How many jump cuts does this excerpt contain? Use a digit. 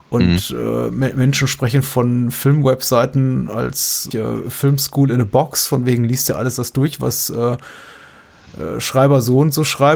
1